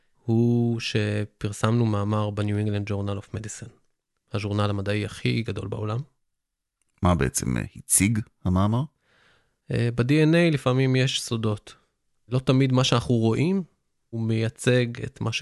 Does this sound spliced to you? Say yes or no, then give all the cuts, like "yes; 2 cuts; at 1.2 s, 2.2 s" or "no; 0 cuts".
no; 0 cuts